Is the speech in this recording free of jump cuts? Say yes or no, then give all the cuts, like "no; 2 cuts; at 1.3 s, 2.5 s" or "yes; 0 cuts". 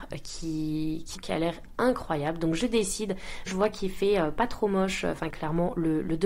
no; 3 cuts; at 1.2 s, 3.5 s, 5.3 s